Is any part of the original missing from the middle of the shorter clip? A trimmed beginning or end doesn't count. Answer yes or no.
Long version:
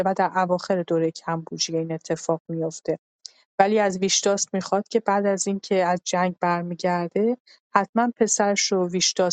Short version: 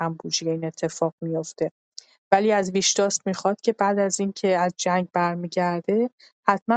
no